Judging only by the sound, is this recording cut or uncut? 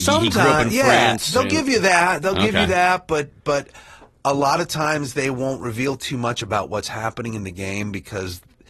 uncut